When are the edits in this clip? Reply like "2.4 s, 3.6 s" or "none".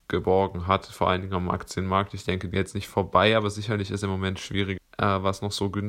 2.5 s, 4.8 s